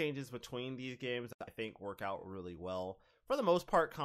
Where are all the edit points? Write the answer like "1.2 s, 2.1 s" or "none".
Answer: none